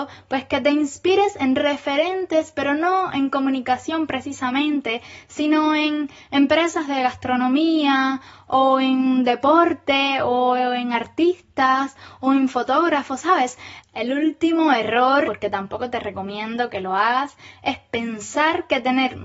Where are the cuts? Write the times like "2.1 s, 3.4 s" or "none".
13.8 s, 15.2 s